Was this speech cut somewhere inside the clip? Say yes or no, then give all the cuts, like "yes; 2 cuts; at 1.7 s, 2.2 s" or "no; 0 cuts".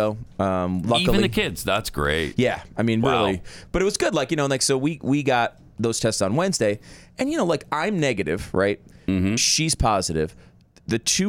no; 0 cuts